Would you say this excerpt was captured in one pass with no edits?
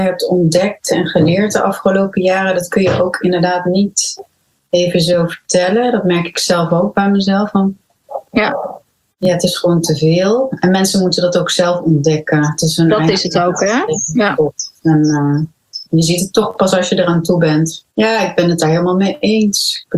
no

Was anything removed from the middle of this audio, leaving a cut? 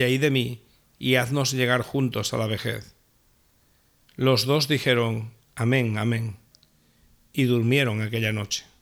no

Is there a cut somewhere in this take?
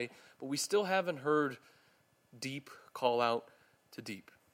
no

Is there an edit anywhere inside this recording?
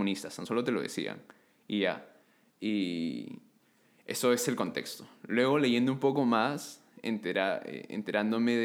no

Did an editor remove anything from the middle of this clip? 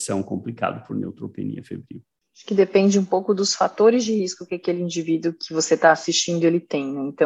no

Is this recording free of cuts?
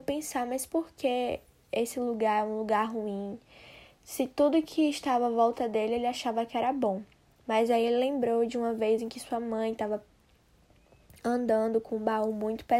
yes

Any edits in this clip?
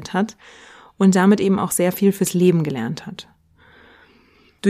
no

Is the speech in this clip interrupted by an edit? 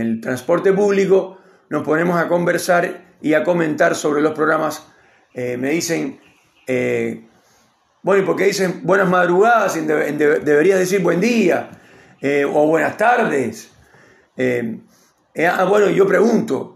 no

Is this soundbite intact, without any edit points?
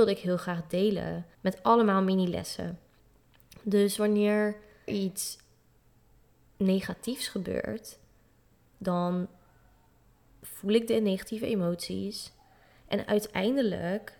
no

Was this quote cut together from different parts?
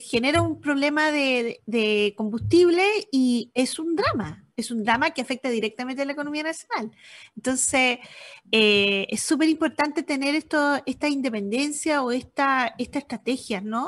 no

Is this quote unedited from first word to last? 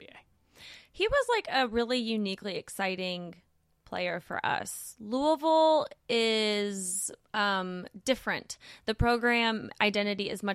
yes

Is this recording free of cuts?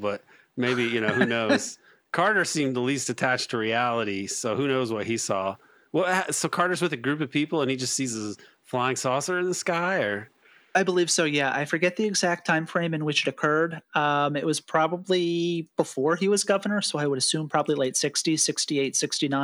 yes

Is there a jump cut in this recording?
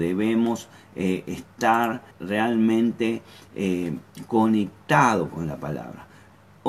yes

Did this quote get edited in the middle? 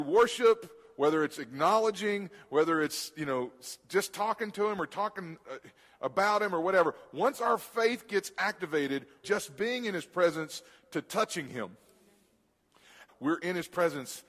yes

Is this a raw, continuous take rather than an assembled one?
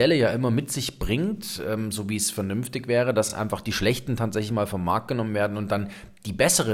yes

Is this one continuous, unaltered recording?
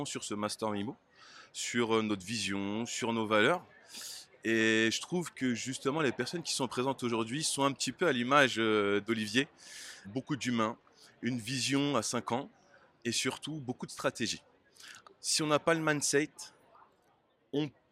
no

